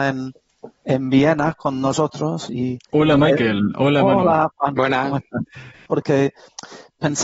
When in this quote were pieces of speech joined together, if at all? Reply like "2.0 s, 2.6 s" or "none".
2.9 s, 5.9 s